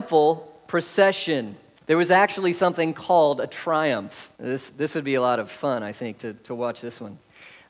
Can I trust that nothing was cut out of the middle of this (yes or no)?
no